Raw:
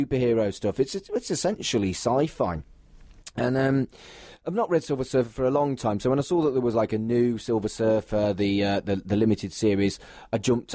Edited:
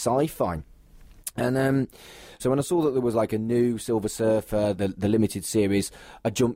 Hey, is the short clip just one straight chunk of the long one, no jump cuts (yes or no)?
no